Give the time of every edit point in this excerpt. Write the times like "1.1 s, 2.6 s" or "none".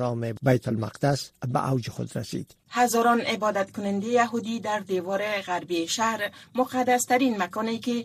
2.6 s